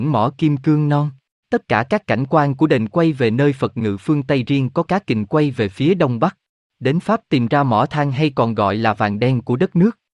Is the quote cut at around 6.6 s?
yes; 2 cuts; at 1.4 s, 6.6 s

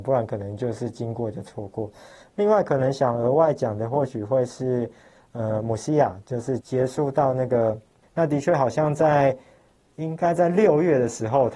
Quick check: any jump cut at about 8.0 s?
yes; 1 cut; at 8.0 s

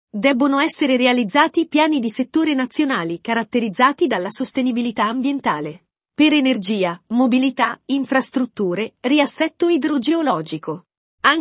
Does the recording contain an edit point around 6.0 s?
no; 0 cuts

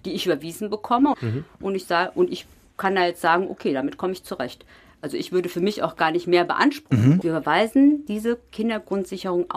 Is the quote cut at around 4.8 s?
no; 2 cuts; at 1.1 s, 7.2 s

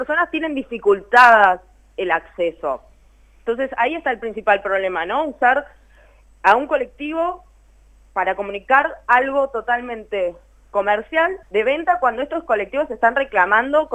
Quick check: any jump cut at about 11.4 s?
yes; 1 cut; at 11.4 s

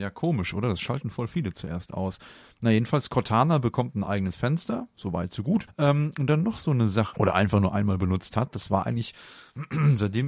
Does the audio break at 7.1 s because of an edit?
yes; 2 cuts; at 5.7 s, 7.1 s

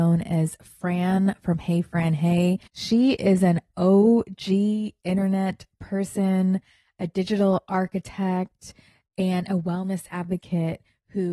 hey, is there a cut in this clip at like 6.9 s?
no; 1 cut; at 2.7 s

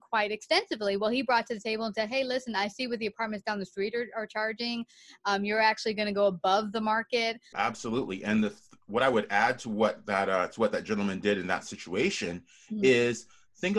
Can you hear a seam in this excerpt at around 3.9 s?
no; 1 cut; at 7.5 s

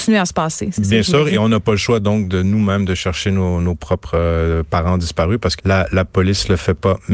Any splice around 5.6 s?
yes; 1 cut; at 5.6 s

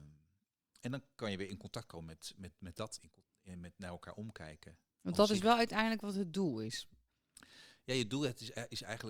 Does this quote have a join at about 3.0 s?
yes; 1 cut; at 3.0 s

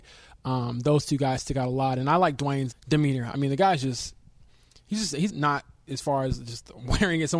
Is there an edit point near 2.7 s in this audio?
yes; 2 cuts; at 2.7 s, 5.3 s

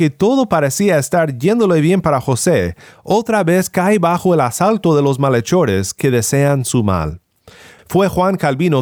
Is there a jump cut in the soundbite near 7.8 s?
yes; 1 cut; at 7.8 s

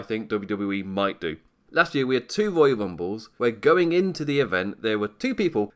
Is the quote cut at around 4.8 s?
no; 1 cut; at 1.7 s

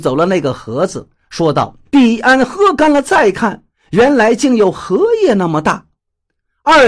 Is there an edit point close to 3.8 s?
no; 1 cut; at 1.9 s

